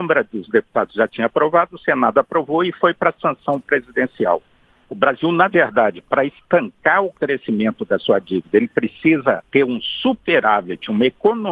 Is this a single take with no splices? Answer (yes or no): no